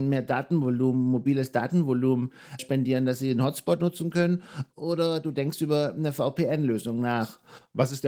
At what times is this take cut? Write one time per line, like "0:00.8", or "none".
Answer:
0:02.6

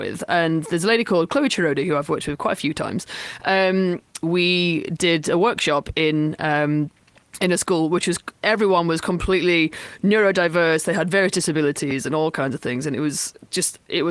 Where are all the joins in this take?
0:04.2

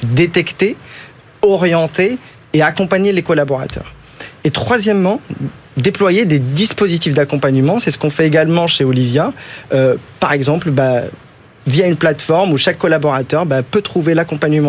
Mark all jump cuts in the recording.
none

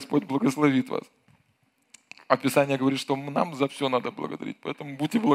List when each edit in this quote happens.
none

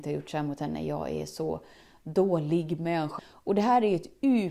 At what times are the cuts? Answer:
0:03.2

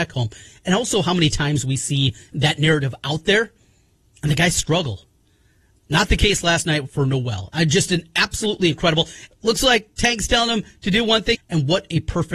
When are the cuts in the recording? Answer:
0:09.3
0:11.3

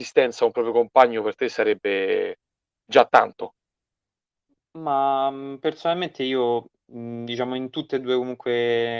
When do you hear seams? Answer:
none

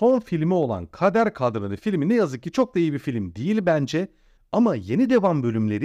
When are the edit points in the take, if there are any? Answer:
0:04.4

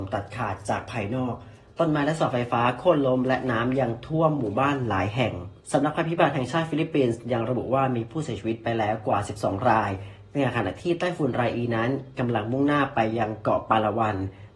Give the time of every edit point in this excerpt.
0:05.6

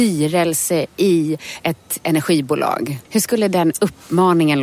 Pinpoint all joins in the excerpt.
0:03.0

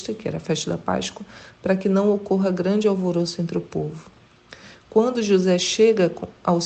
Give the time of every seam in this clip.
none

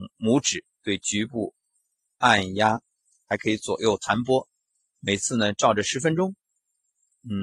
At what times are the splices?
none

